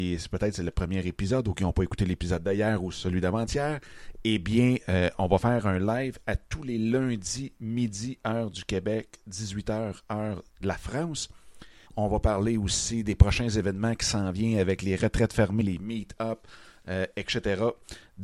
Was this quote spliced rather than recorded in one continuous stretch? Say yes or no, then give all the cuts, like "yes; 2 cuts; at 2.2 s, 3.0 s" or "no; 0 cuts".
yes; 2 cuts; at 11.9 s, 15.6 s